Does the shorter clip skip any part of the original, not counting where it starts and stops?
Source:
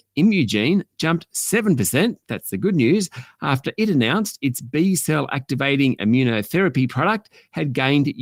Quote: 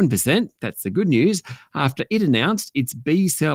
no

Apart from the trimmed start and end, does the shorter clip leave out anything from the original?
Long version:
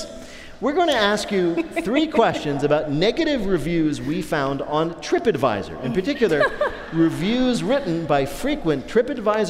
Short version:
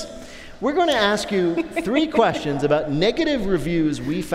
no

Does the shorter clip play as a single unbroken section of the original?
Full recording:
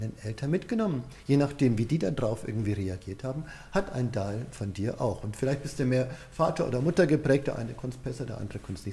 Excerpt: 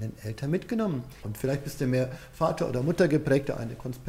no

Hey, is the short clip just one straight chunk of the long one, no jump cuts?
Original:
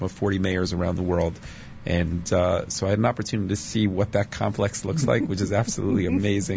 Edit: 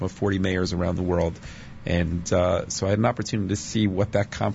yes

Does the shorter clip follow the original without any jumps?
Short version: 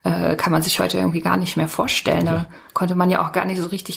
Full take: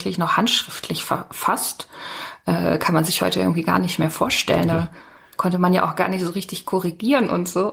no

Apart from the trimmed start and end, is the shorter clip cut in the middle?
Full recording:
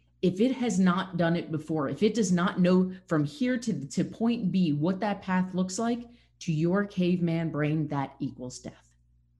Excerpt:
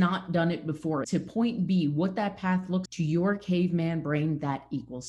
yes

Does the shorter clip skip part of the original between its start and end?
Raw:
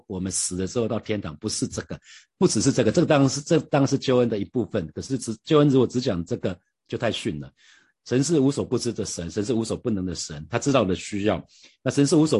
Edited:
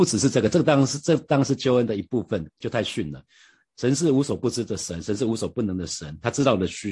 yes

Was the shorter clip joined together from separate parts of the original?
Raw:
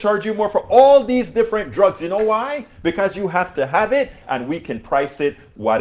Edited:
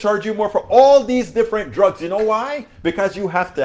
no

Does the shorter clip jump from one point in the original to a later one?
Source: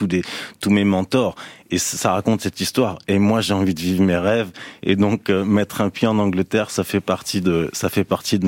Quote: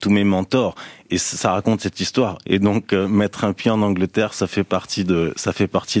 yes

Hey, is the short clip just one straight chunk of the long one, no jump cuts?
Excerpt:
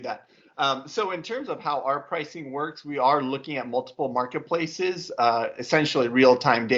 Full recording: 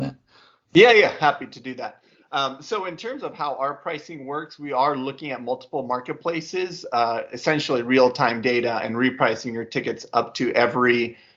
yes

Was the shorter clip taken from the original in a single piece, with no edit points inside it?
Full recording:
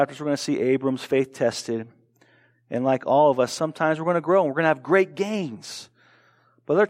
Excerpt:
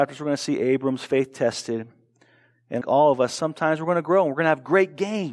no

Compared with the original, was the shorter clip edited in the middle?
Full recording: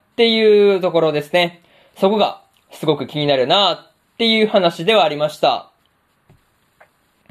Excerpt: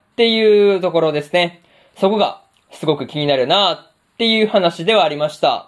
no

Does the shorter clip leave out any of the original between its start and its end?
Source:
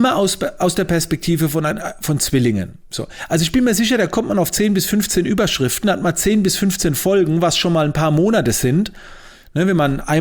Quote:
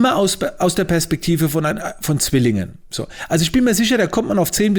no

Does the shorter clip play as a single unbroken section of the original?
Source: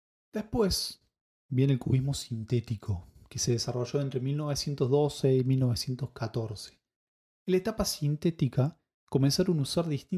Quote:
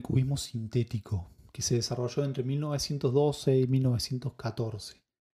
yes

